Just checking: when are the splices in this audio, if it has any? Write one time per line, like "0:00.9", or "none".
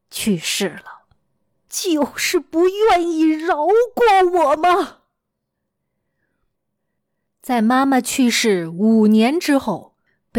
0:01.7
0:06.5